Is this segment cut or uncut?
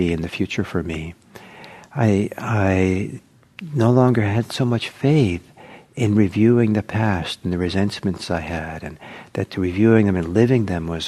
uncut